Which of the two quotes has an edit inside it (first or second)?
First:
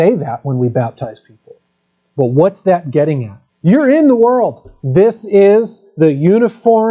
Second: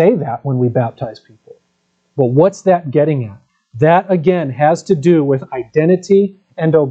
first